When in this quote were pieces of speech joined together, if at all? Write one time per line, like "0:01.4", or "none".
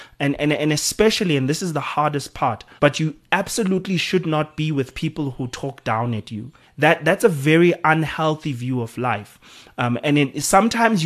0:02.8
0:06.6

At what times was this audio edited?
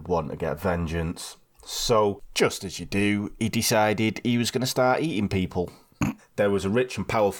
0:06.2

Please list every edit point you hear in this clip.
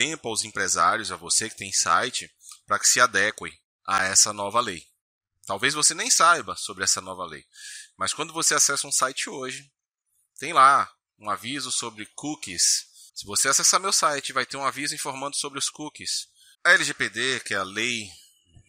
0:13.1
0:16.5

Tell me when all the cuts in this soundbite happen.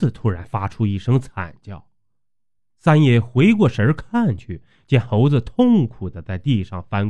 none

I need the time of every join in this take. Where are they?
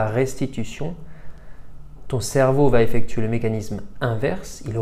0:02.1

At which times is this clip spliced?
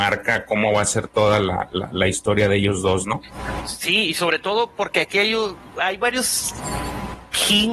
none

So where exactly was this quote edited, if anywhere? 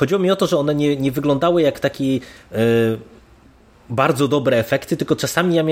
none

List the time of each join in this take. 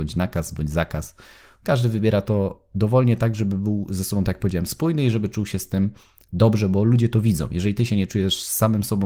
none

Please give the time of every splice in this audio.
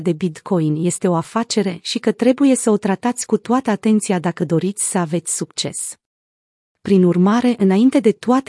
none

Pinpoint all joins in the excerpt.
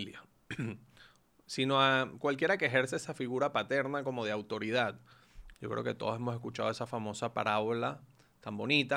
0:05.5

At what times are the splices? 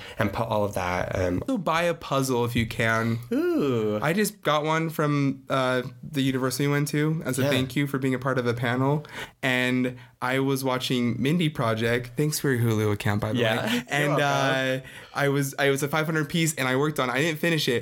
0:01.5

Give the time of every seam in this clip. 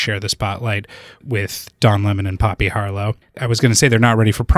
none

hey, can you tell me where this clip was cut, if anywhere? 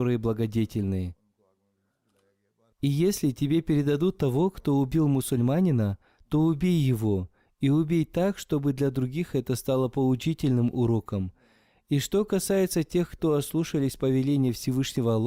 0:02.7

